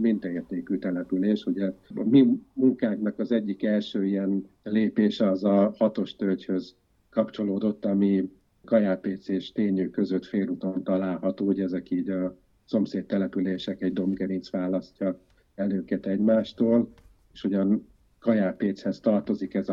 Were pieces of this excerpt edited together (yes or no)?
yes